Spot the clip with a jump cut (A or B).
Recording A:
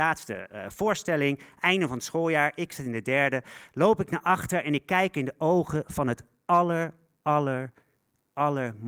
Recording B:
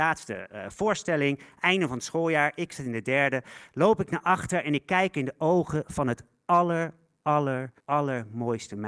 B